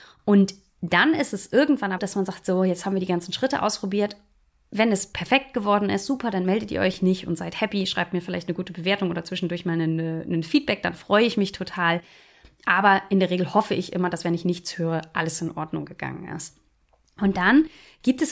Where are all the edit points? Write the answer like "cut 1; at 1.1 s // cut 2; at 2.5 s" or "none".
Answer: cut 1; at 2.0 s